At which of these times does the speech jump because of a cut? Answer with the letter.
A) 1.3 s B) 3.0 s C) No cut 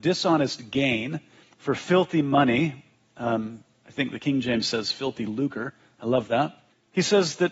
C